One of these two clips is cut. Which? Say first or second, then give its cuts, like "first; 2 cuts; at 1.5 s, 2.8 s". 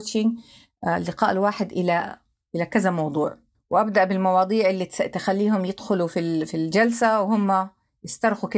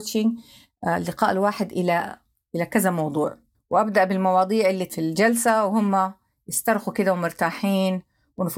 second; 1 cut; at 4.9 s